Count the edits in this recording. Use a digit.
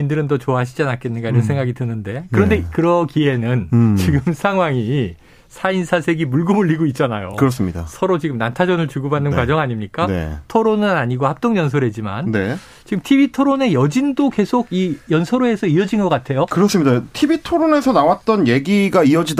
0